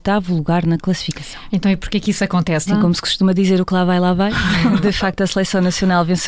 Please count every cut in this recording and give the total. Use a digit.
1